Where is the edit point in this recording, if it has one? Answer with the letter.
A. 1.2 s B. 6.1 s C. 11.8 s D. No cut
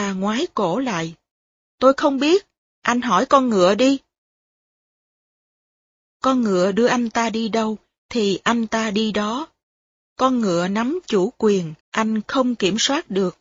C